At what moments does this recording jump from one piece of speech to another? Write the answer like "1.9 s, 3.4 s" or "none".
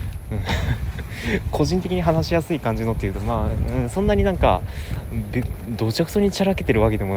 none